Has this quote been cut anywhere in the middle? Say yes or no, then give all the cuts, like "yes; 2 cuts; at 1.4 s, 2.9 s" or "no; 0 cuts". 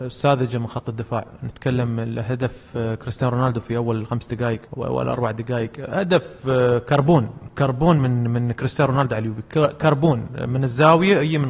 yes; 1 cut; at 4.7 s